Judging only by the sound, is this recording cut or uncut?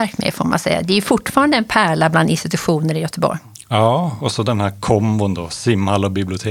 uncut